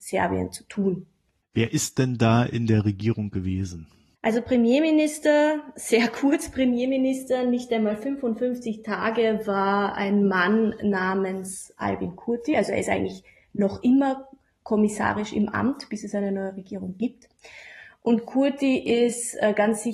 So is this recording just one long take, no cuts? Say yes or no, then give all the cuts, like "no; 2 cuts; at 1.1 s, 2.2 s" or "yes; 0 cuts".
yes; 0 cuts